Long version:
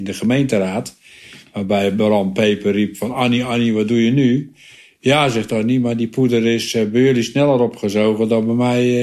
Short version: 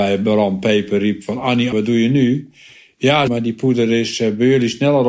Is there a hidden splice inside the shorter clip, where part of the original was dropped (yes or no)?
yes